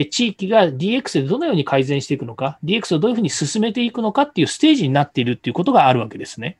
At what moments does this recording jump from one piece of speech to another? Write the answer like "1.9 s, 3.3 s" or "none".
none

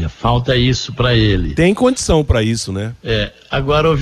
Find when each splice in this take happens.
none

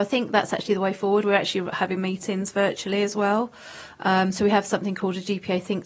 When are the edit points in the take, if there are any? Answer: none

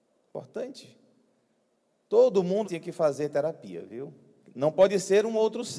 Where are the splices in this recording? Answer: 2.6 s, 4.4 s

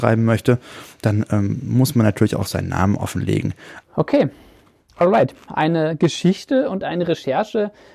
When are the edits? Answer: 3.8 s, 5.5 s

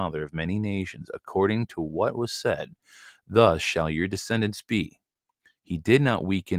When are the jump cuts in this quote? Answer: none

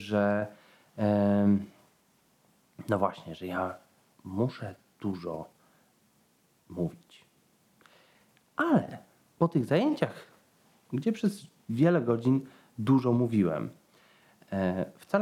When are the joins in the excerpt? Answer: none

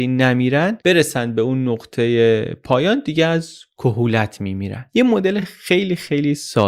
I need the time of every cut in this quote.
none

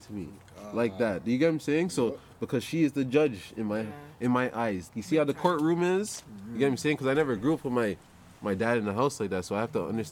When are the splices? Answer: 4.9 s

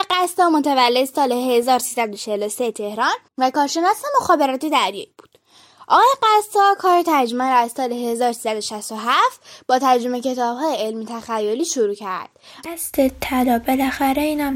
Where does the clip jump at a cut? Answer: 3.3 s, 12.6 s

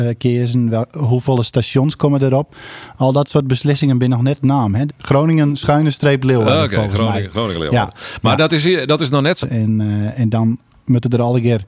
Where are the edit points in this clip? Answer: 4.9 s, 9.4 s

